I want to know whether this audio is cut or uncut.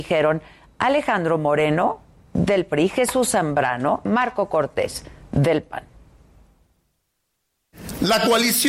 cut